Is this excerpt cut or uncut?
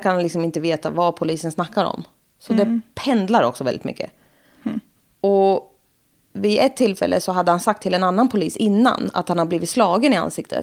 uncut